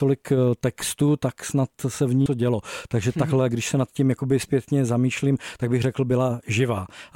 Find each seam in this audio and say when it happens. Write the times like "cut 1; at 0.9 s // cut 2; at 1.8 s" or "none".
cut 1; at 2.3 s